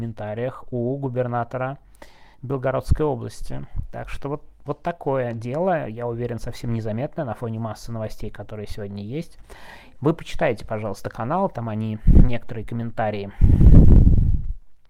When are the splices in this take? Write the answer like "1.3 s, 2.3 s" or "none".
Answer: 9.9 s